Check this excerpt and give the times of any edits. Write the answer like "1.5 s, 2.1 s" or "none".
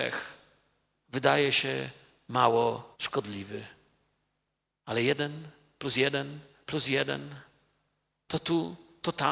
2.9 s